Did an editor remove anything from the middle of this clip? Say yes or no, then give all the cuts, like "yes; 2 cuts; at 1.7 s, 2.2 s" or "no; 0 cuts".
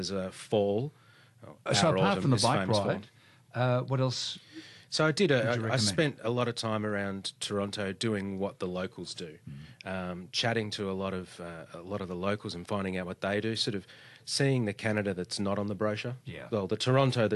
yes; 1 cut; at 1.7 s